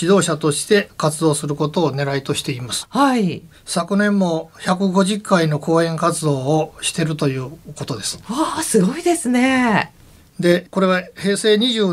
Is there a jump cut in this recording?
no; 0 cuts

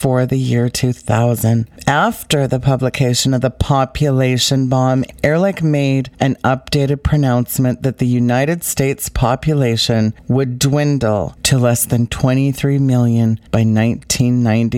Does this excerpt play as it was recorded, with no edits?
yes; 0 cuts

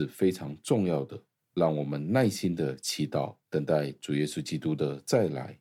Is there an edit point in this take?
yes; 2 cuts; at 1.4 s, 3.4 s

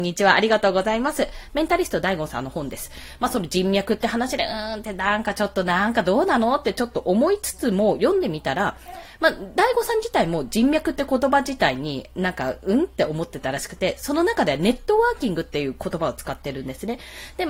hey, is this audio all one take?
yes; 0 cuts

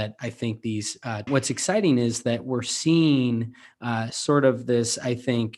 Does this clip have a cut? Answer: yes; 1 cut; at 1.3 s

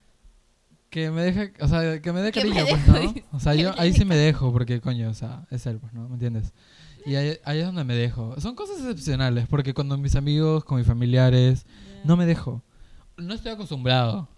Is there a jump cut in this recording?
no; 0 cuts

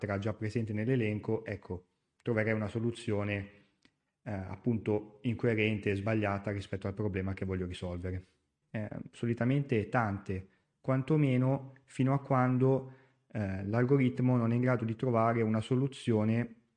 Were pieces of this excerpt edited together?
yes; 1 cut; at 8.6 s

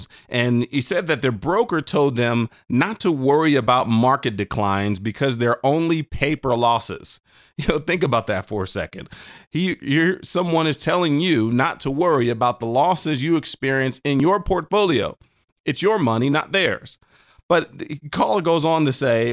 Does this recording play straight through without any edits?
yes; 0 cuts

